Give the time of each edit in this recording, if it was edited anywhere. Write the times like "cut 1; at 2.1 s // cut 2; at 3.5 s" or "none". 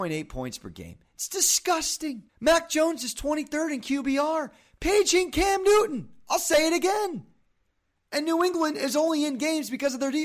cut 1; at 2.3 s